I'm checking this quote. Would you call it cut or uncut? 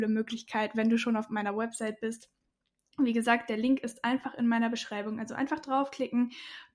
uncut